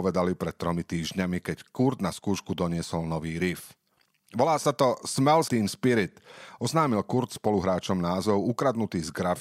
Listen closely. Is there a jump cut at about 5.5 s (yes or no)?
yes